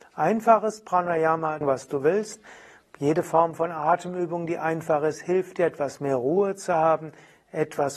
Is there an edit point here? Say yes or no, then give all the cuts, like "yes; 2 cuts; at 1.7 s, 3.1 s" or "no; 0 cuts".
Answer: yes; 1 cut; at 1.6 s